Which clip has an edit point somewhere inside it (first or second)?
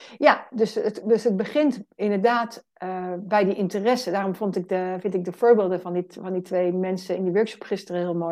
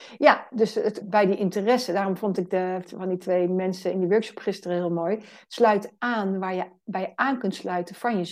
second